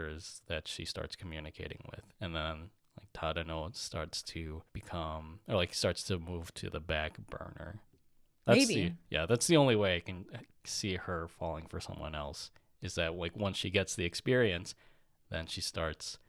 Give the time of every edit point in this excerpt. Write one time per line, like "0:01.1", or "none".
0:04.7